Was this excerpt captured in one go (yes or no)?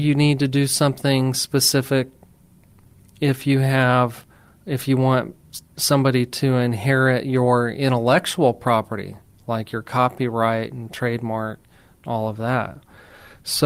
yes